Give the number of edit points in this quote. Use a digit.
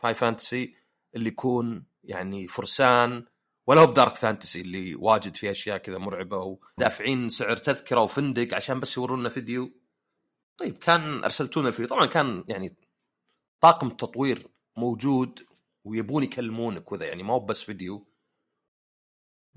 1